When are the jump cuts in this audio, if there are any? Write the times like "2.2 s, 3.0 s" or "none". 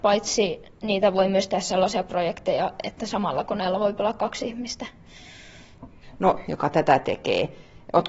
6.4 s